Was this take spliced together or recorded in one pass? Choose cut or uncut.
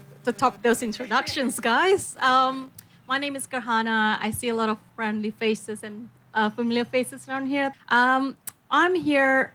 cut